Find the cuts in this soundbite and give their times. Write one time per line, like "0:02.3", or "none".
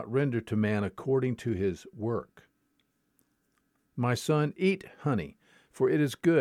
none